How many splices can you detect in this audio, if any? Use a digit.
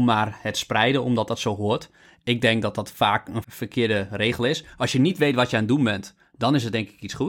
1